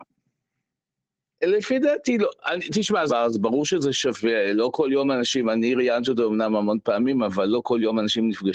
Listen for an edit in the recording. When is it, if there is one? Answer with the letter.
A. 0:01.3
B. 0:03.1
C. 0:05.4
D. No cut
B